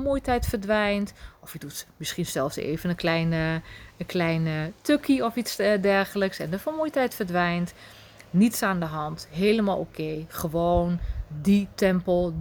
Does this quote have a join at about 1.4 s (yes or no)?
no